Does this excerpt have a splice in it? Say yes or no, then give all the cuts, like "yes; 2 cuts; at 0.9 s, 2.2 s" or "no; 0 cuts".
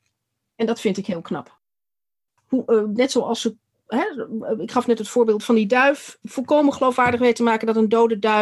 yes; 1 cut; at 2.4 s